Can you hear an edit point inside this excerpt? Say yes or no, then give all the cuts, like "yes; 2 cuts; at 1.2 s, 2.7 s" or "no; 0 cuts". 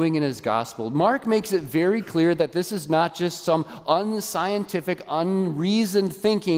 no; 0 cuts